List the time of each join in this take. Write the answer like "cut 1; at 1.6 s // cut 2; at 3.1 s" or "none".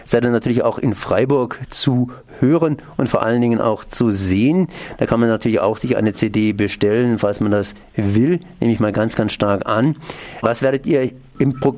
cut 1; at 10.4 s